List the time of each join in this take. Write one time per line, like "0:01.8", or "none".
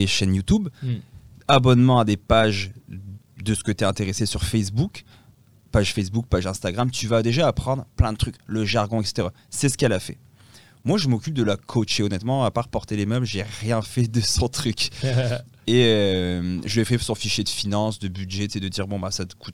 none